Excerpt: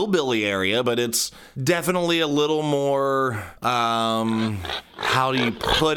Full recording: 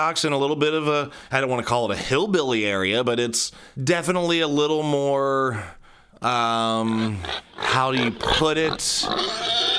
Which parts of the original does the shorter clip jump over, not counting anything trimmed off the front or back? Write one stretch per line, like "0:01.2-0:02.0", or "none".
0:05.8-0:06.2